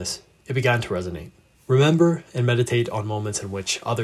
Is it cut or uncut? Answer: cut